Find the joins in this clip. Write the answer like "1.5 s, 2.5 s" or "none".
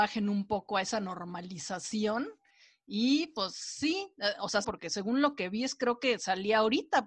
4.6 s